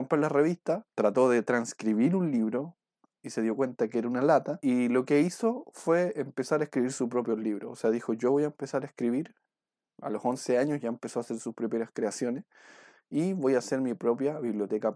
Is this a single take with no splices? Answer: yes; 0 cuts

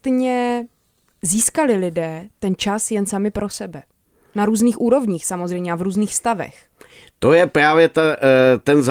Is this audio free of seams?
yes; 0 cuts

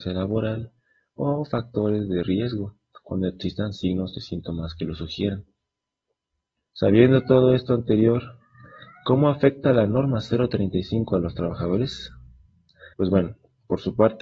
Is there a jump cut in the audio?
yes; 2 cuts; at 6.7 s, 12.9 s

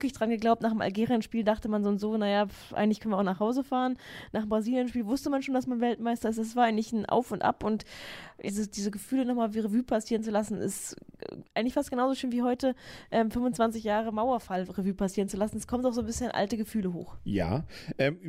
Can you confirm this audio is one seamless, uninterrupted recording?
no; 1 cut; at 8.5 s

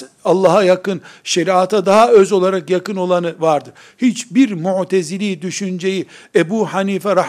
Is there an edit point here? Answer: no; 0 cuts

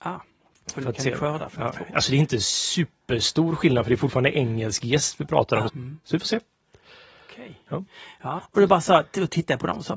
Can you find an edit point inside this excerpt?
yes; 2 cuts; at 5.7 s, 8.4 s

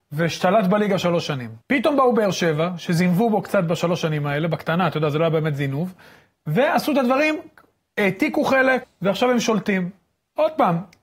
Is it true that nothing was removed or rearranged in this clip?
no; 2 cuts; at 1.6 s, 8.8 s

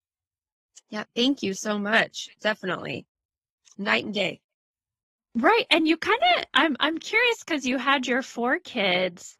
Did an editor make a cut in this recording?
no; 0 cuts

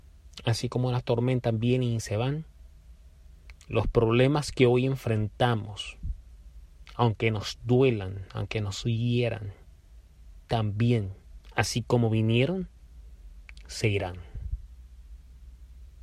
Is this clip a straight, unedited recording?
yes; 0 cuts

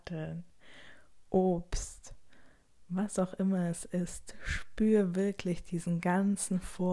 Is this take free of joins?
yes; 0 cuts

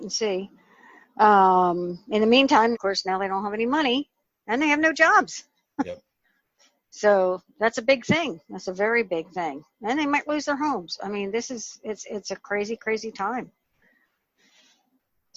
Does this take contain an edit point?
yes; 1 cut; at 2.7 s

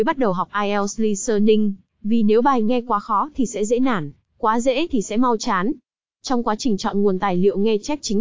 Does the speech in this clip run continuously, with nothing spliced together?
yes; 0 cuts

